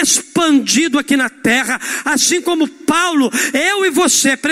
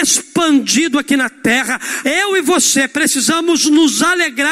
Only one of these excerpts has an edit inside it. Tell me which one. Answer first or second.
second